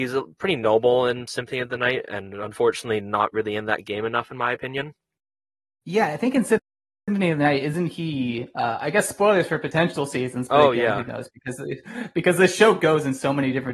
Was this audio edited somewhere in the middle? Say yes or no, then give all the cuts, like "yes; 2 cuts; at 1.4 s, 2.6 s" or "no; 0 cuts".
no; 0 cuts